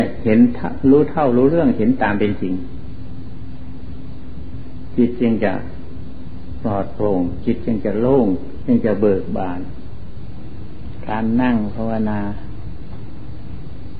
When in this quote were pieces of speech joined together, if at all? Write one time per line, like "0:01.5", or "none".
0:08.6